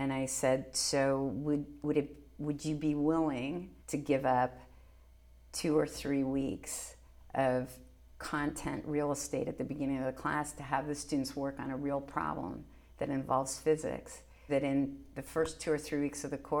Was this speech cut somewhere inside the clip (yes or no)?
yes